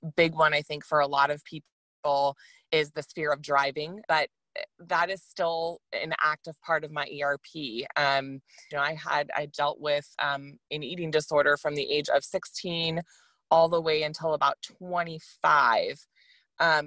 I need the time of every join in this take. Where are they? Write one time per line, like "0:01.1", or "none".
0:04.0
0:08.7